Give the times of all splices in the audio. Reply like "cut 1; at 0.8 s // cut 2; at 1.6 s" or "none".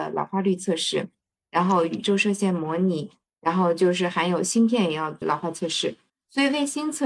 cut 1; at 6.1 s